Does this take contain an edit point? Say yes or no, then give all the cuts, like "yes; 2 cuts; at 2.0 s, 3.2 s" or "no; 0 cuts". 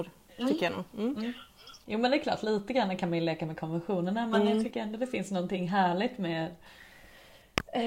no; 0 cuts